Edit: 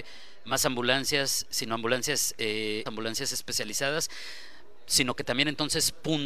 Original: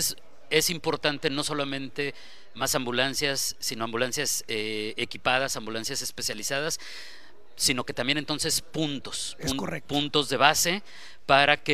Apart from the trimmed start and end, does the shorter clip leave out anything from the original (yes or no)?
yes